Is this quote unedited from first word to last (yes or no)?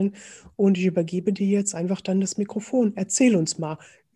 yes